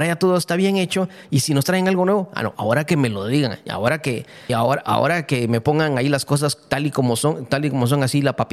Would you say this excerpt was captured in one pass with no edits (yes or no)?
no